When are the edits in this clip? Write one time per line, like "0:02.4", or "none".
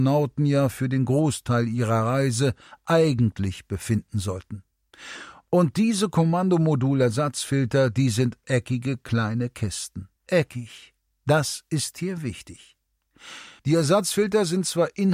0:10.2
0:13.6